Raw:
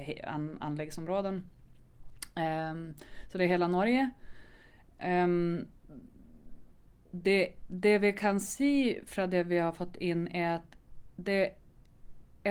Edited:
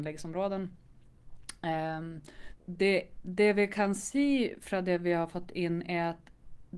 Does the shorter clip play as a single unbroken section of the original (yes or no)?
no